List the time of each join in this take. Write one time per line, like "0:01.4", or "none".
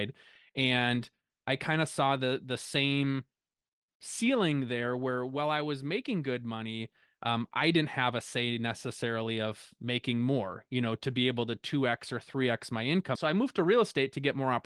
0:13.1